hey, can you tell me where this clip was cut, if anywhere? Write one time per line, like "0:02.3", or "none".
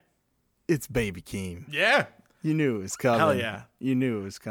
none